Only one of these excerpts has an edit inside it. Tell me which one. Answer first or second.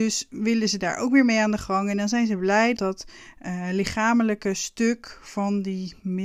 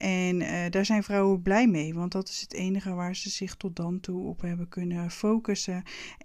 first